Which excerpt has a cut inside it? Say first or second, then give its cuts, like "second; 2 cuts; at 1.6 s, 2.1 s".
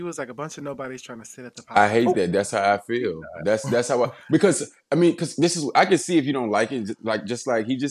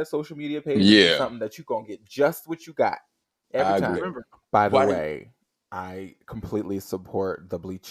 second; 1 cut; at 3.9 s